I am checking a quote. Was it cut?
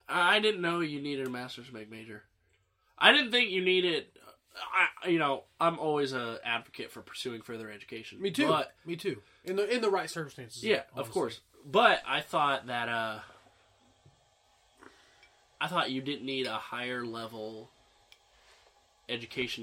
no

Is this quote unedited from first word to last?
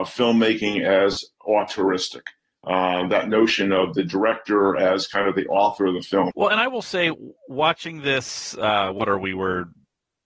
no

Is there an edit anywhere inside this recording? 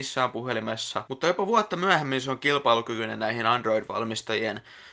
no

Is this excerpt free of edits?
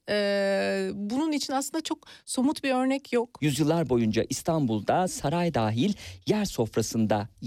no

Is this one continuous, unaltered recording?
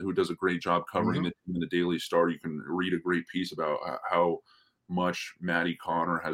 yes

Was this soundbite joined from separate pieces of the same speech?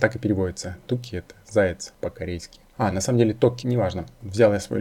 yes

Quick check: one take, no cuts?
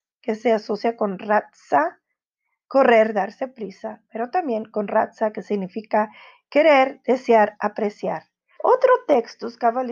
no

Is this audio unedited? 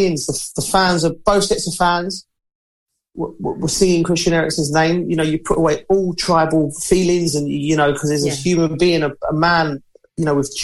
yes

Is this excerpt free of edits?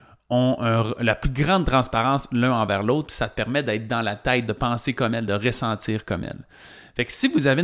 no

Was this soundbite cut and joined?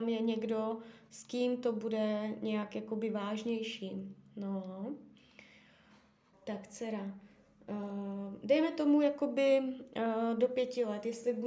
yes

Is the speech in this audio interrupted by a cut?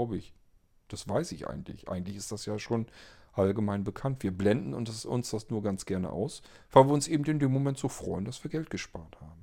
no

